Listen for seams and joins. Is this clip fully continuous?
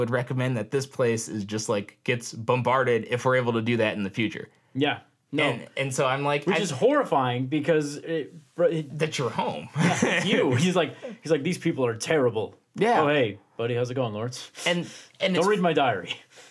yes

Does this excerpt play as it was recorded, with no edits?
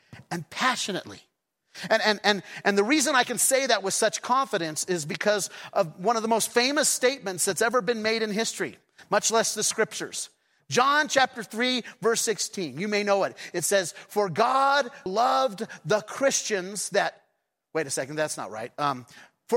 no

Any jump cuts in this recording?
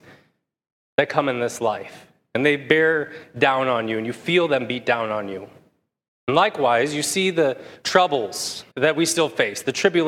yes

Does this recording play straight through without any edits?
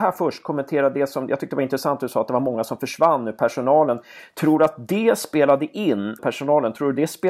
no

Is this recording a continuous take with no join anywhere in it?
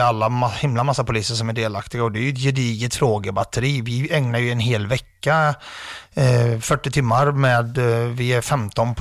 yes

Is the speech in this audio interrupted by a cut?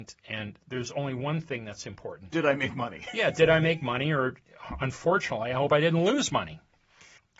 no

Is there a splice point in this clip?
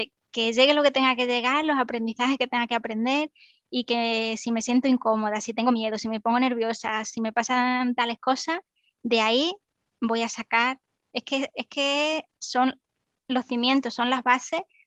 no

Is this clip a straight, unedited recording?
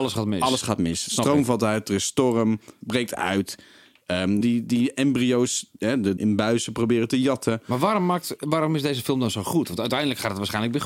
no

